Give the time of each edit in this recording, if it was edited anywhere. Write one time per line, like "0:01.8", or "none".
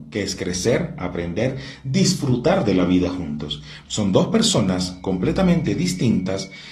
0:03.9